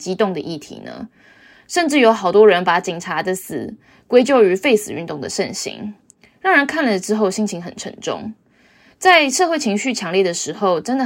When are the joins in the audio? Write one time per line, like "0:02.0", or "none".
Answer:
none